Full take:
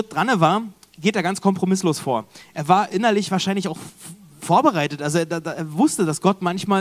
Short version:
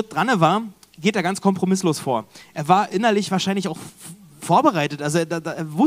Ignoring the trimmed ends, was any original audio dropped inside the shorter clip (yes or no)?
no